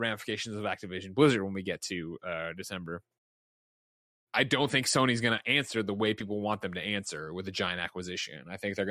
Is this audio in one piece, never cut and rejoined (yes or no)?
yes